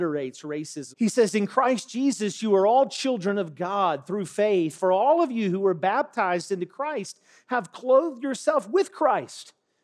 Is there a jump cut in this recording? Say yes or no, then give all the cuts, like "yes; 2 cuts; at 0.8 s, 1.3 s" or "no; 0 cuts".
yes; 1 cut; at 0.9 s